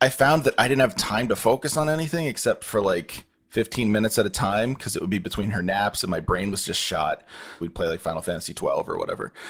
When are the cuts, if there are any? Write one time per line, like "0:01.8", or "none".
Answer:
0:07.6